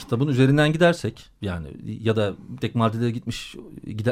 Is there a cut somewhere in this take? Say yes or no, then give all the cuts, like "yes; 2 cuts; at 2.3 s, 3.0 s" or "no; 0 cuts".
yes; 1 cut; at 2.6 s